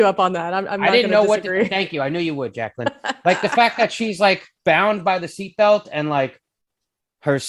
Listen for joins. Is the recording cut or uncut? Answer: cut